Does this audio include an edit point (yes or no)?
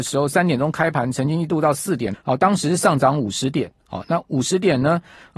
yes